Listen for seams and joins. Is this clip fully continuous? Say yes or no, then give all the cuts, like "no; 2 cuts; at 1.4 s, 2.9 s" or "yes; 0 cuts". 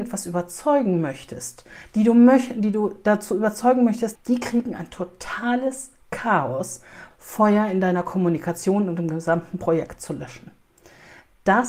no; 2 cuts; at 4.2 s, 7.1 s